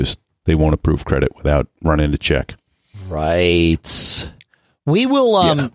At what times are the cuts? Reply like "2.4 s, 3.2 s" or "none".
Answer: none